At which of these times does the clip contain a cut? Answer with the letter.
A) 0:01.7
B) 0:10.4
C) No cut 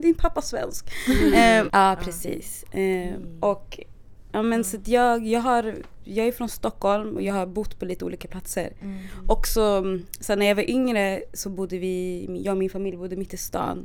A